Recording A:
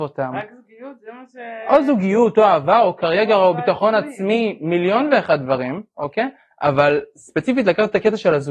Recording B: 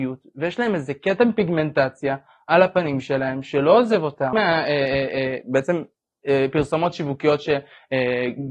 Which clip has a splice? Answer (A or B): B